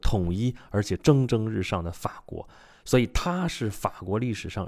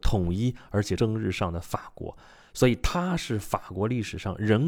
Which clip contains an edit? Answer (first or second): second